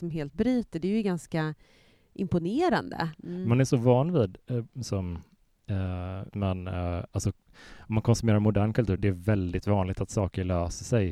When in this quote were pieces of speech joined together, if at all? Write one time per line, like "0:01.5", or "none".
0:03.1
0:06.3
0:09.0